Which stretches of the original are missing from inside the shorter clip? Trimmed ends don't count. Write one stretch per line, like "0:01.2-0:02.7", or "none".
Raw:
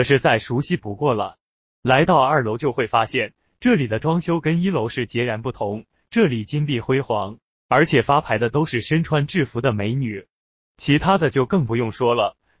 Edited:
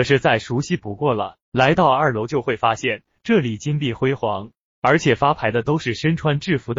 0:01.4-0:01.7
0:03.5-0:06.0